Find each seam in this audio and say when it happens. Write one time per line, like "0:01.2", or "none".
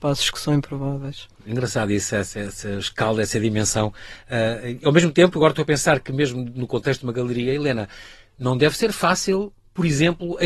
none